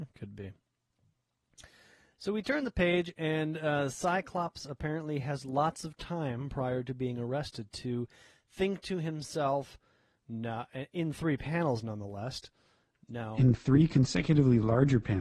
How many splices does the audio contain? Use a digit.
0